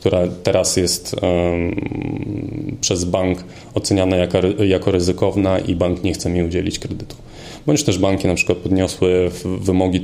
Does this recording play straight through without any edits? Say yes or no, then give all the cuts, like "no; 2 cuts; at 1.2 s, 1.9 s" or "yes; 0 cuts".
yes; 0 cuts